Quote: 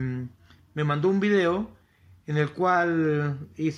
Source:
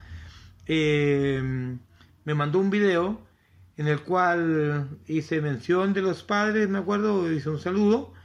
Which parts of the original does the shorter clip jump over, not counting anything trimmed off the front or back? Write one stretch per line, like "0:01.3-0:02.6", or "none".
none